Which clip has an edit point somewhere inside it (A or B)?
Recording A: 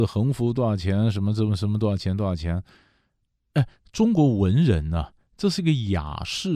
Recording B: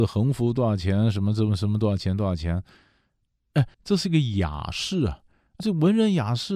B